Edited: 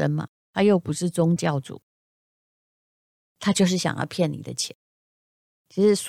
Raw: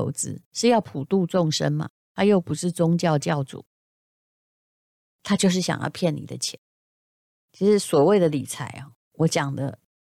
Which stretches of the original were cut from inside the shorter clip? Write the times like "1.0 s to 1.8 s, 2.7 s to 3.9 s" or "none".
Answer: 3.0 s to 3.2 s